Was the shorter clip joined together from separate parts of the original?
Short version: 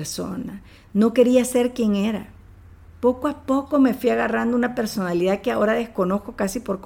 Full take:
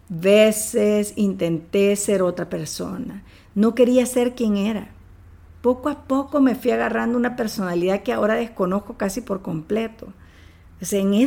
no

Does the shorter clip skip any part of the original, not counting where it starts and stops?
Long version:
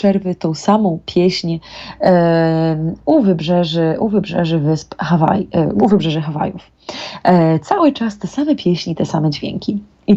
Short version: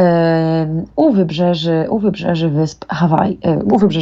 no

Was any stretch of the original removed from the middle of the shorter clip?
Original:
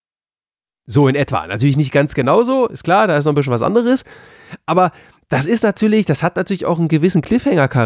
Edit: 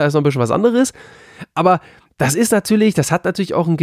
no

